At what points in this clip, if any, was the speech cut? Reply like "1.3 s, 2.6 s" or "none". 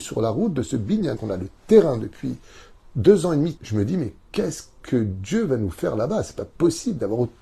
1.2 s, 3.6 s